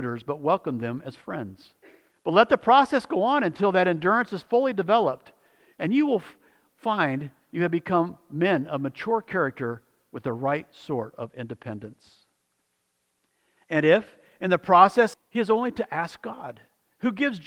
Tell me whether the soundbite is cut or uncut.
cut